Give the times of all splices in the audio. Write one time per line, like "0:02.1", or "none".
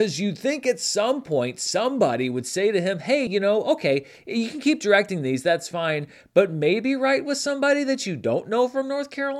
none